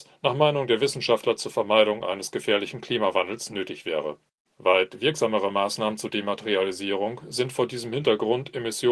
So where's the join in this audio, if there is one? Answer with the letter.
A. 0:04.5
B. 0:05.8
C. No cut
A